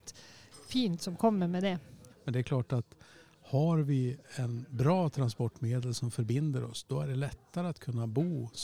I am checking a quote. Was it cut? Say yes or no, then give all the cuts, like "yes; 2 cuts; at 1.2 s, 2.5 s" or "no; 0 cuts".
yes; 1 cut; at 2.1 s